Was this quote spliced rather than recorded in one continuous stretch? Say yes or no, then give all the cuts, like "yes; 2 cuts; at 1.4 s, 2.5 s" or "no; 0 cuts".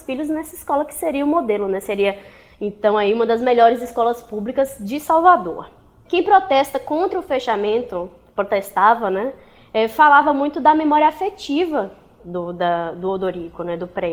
no; 0 cuts